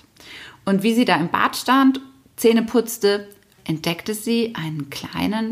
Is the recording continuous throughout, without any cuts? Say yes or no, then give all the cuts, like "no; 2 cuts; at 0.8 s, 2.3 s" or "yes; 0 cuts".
no; 1 cut; at 3.6 s